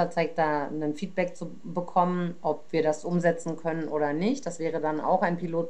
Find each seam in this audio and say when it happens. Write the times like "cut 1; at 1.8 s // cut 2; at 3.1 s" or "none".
none